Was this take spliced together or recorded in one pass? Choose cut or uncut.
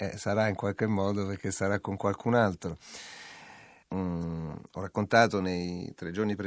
cut